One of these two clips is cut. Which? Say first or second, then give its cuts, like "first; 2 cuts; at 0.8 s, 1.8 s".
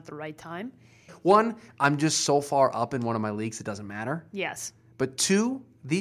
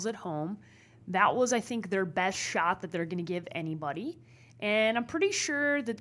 first; 1 cut; at 1.1 s